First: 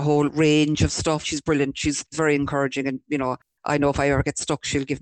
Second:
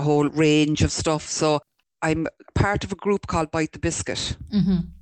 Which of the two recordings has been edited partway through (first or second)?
first